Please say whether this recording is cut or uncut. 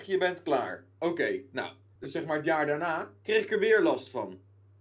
cut